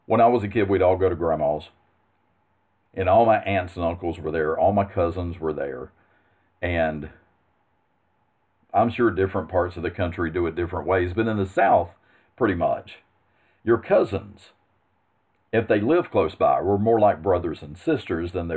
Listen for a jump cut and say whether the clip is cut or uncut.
uncut